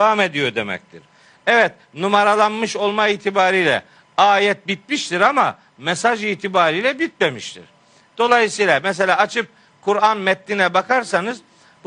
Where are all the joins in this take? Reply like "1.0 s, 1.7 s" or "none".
none